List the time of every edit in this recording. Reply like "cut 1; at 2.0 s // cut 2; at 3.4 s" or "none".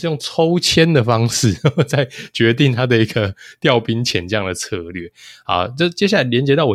none

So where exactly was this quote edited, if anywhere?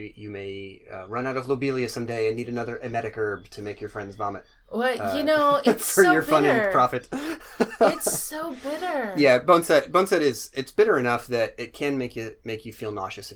none

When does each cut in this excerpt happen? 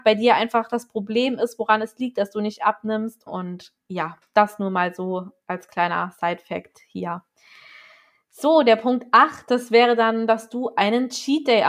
cut 1; at 3.3 s

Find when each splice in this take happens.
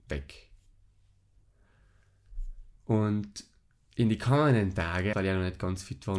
cut 1; at 2.8 s // cut 2; at 5.1 s

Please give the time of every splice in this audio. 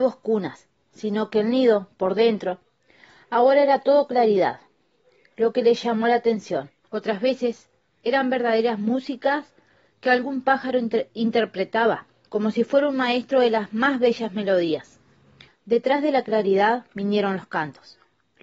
cut 1; at 6.8 s // cut 2; at 12.3 s // cut 3; at 15.5 s

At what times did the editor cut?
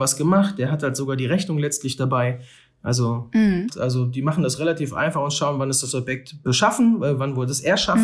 cut 1; at 3.7 s

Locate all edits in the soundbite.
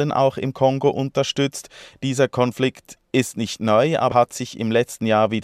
cut 1; at 4.1 s

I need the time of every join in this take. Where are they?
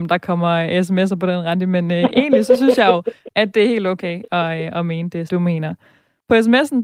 cut 1; at 5.3 s

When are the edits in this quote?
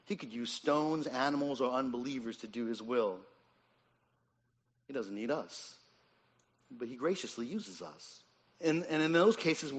cut 1; at 8.5 s

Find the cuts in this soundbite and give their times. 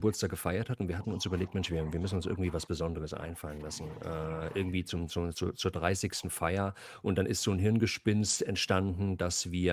none

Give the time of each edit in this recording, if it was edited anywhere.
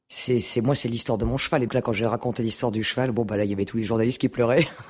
cut 1; at 1.7 s

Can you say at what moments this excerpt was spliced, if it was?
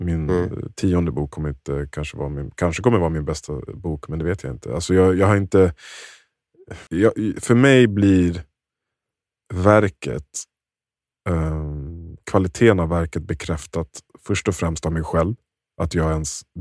cut 1; at 6.9 s

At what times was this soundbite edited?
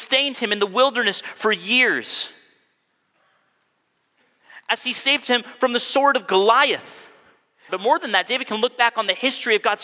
cut 1; at 7.7 s

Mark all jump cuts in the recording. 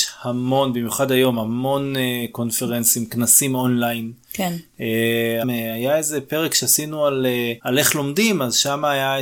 cut 1; at 5.4 s // cut 2; at 7.6 s

